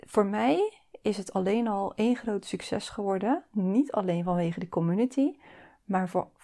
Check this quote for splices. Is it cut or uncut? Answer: uncut